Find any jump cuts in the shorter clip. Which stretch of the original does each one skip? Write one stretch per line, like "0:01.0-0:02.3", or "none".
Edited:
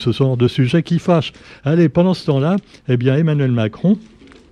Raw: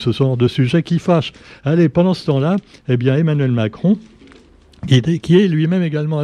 none

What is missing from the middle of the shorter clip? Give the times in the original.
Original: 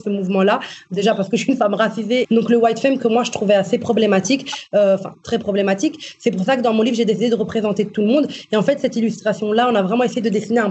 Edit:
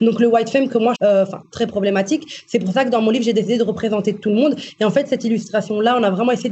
0:03.2-0:04.7

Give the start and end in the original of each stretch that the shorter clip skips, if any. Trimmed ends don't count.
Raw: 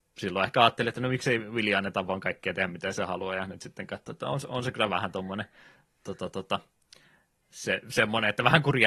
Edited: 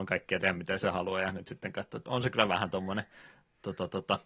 0:04.2-0:04.5

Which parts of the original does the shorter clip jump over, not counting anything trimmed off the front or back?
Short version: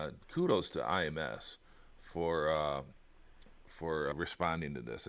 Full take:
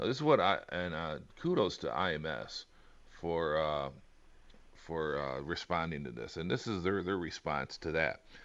0:05.2-0:05.4

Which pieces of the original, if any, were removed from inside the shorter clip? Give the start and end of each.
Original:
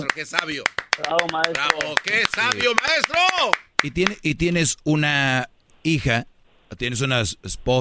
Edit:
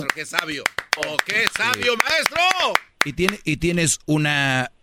0:01.0-0:01.7

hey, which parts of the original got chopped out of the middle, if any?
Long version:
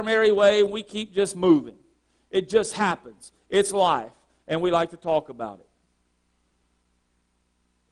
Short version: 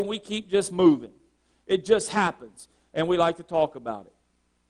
0:03.4-0:04.3

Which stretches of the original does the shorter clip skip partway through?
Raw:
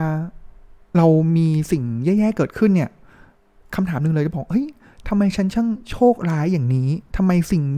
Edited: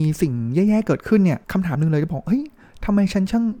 0:02.9-0:03.7

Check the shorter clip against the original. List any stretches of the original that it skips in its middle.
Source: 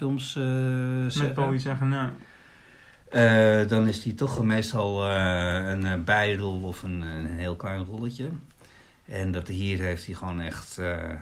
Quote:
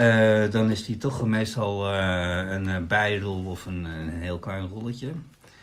none

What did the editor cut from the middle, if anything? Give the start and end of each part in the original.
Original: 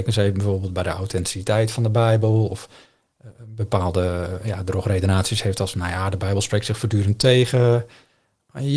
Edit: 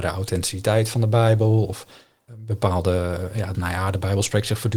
0:03.1-0:03.4
0:04.6-0:05.7

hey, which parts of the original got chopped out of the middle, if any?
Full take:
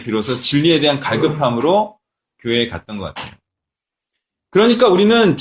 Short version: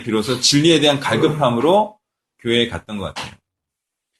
none

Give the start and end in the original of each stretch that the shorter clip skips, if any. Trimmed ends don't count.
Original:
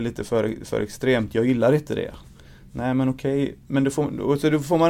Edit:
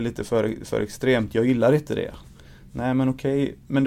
none

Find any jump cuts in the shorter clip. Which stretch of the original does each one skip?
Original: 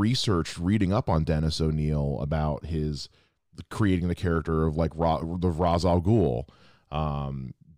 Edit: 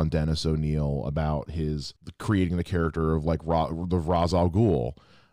0:03.1-0:03.5

